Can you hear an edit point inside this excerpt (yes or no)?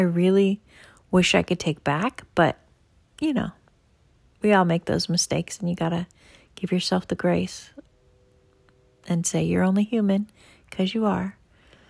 no